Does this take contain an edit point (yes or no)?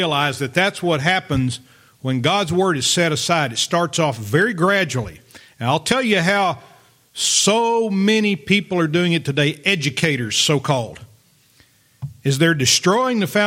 no